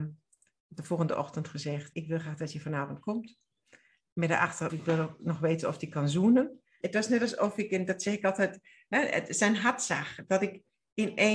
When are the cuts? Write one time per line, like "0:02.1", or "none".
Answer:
0:01.9
0:04.7
0:06.8